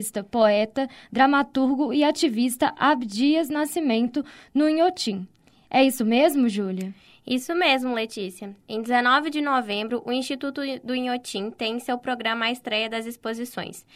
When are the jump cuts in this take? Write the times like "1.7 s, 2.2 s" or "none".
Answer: none